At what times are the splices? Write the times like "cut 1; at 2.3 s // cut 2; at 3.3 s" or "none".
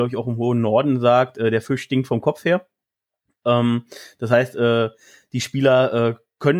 none